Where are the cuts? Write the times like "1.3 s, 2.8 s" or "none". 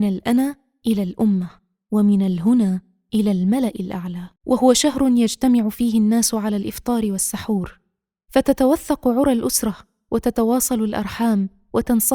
4.4 s